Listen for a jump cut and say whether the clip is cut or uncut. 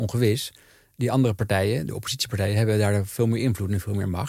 uncut